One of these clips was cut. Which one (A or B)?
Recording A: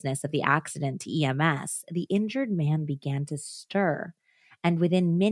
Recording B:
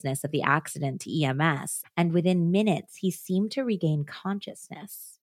B